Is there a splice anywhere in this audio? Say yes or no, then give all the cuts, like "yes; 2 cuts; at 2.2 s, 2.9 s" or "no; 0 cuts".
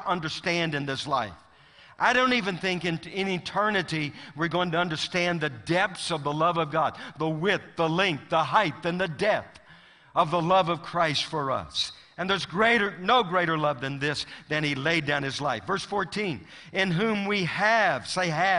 no; 0 cuts